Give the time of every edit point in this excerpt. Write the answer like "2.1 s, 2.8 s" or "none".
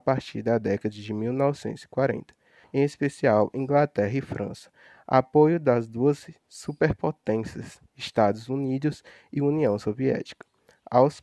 2.6 s

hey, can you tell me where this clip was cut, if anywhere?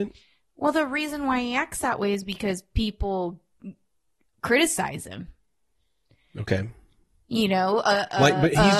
none

